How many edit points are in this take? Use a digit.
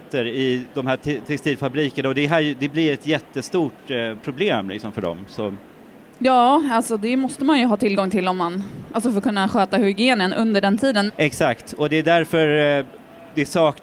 1